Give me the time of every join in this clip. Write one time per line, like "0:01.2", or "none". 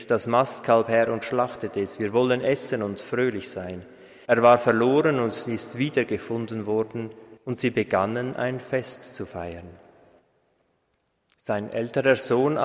0:04.2
0:07.4